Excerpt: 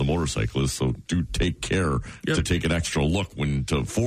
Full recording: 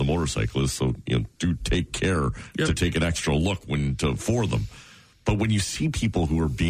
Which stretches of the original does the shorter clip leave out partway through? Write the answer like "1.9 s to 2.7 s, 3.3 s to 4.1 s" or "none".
1.0 s to 1.3 s